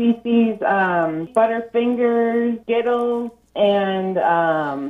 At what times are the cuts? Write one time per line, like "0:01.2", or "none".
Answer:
0:02.6